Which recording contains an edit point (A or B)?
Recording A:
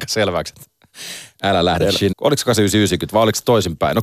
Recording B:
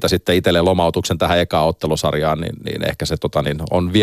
A